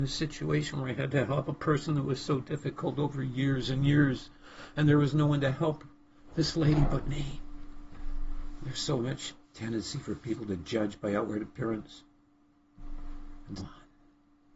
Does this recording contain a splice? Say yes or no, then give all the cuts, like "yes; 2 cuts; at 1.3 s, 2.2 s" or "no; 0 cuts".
yes; 2 cuts; at 9.4 s, 13.6 s